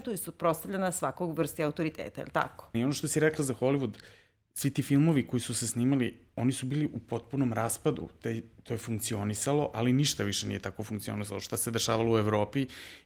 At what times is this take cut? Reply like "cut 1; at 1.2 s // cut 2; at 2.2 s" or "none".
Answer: cut 1; at 2.7 s